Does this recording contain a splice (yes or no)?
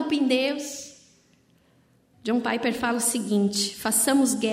yes